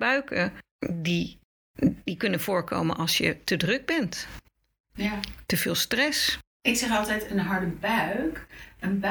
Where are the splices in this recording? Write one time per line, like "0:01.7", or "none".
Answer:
none